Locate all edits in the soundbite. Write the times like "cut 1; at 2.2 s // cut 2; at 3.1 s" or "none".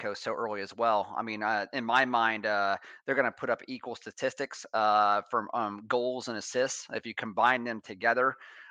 none